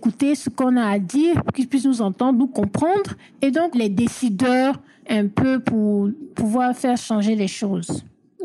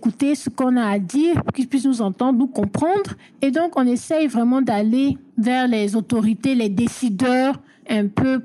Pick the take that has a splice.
first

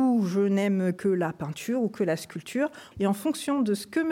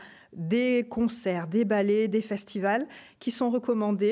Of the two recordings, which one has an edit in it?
first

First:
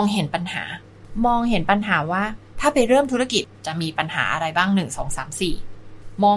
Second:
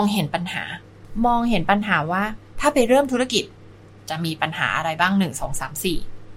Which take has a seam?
first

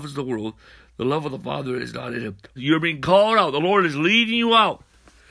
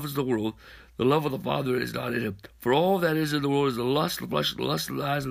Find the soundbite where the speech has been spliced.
first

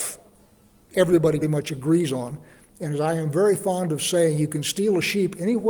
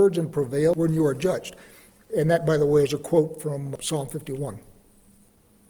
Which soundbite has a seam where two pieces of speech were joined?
first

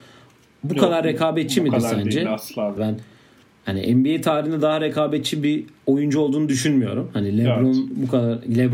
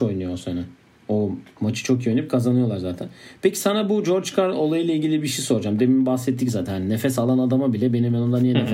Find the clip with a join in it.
first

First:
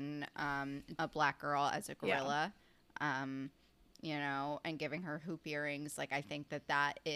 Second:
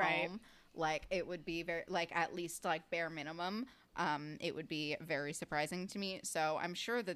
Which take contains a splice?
first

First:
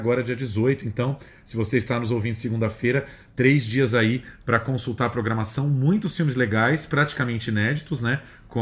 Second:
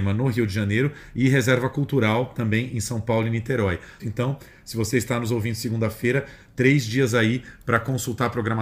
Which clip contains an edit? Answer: second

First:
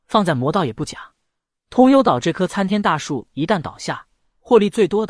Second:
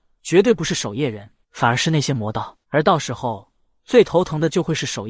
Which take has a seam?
second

